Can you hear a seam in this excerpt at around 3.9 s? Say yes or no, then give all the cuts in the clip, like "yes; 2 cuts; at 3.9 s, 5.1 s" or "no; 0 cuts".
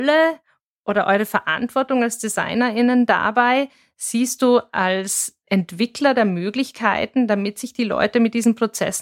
no; 0 cuts